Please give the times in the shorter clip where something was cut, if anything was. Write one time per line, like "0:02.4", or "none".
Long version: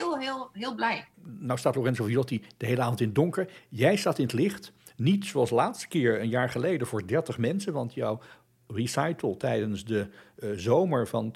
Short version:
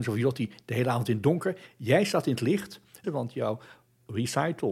0:03.0